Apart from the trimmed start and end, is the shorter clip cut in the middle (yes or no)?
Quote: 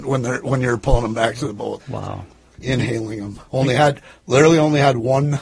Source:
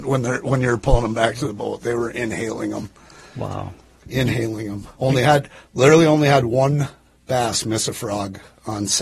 yes